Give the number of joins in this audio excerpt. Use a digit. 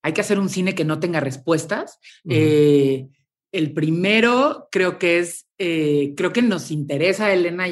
1